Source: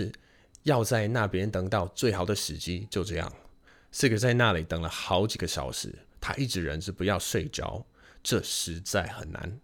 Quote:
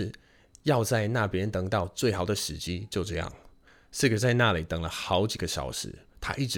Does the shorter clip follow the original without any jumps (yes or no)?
yes